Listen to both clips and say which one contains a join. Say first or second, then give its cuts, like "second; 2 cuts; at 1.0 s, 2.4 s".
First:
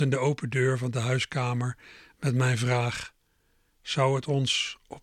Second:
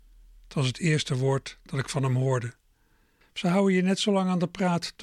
second; 1 cut; at 3.2 s